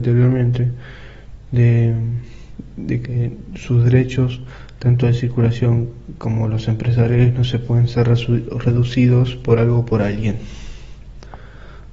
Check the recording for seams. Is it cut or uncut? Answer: cut